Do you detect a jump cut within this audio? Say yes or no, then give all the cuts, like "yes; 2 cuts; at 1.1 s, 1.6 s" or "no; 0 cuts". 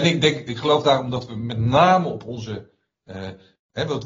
no; 0 cuts